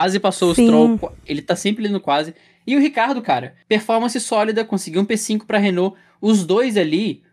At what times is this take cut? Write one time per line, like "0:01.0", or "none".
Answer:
none